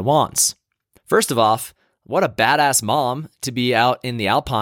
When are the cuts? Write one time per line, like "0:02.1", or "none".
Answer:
0:01.0